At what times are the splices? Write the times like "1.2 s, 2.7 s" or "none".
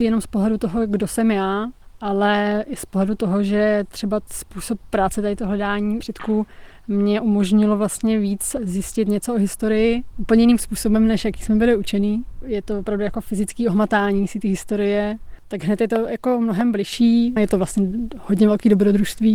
15.4 s, 17.4 s